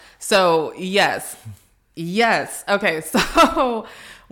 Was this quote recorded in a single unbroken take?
yes; 0 cuts

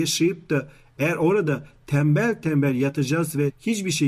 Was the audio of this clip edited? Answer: no; 0 cuts

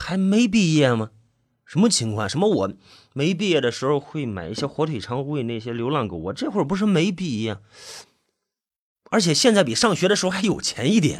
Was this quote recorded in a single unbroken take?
yes; 0 cuts

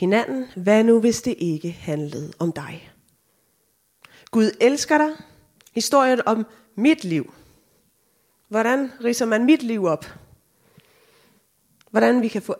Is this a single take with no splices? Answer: no; 1 cut; at 5.6 s

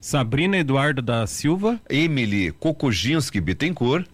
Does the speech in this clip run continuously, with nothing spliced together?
yes; 0 cuts

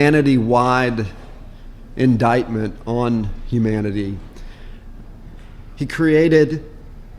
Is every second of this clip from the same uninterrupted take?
no; 1 cut; at 5.0 s

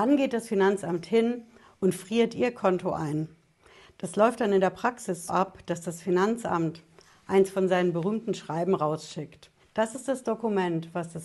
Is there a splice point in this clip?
yes; 2 cuts; at 5.3 s, 9.6 s

